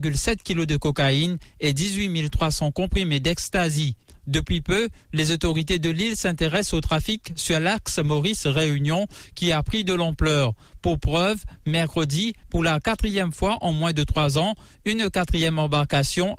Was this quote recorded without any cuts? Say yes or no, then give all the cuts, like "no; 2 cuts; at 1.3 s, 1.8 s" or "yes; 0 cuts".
yes; 0 cuts